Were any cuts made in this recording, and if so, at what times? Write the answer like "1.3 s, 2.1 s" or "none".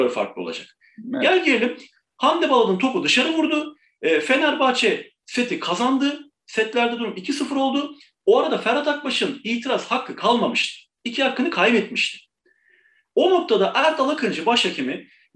none